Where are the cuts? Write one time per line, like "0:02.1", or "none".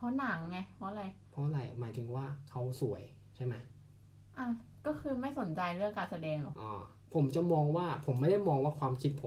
0:06.5